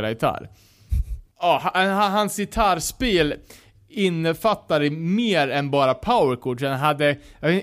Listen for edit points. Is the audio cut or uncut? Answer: uncut